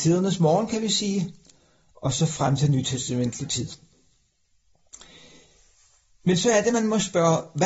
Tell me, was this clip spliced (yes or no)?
no